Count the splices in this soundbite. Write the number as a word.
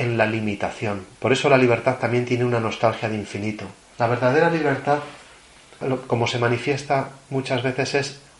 three